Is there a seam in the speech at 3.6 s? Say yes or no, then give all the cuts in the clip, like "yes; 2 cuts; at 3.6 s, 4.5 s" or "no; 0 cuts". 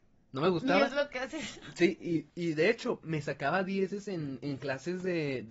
no; 1 cut; at 2.3 s